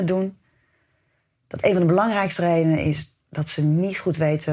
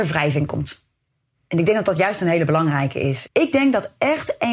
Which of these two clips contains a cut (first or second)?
second